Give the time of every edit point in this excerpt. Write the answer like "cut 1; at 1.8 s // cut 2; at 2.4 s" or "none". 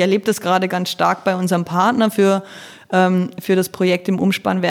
none